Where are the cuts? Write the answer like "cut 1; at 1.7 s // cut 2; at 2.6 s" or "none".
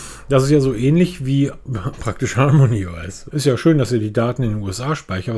cut 1; at 3.3 s